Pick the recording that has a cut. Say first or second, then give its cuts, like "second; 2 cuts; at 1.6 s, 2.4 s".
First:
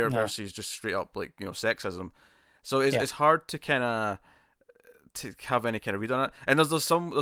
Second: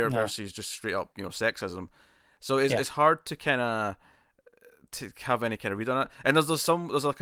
second; 1 cut; at 1.1 s